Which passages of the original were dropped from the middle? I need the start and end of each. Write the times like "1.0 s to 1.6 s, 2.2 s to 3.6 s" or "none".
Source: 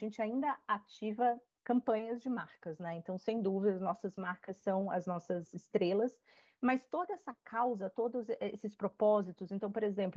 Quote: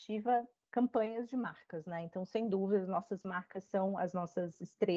none